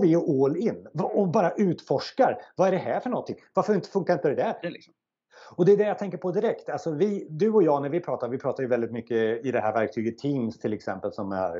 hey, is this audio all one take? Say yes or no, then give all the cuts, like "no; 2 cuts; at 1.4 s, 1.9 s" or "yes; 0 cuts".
no; 1 cut; at 4.6 s